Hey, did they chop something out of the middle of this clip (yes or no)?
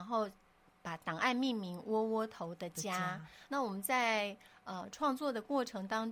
no